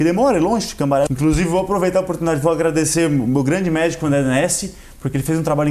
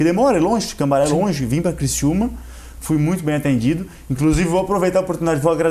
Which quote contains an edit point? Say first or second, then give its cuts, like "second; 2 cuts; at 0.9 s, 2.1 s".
first; 1 cut; at 1.1 s